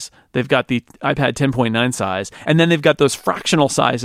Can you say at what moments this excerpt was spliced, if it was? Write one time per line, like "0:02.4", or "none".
none